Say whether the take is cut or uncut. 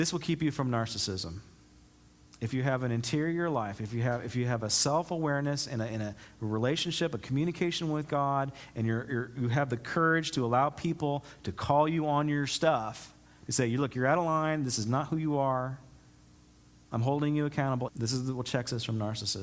cut